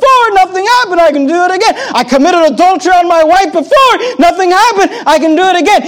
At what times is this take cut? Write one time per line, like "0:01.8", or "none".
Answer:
none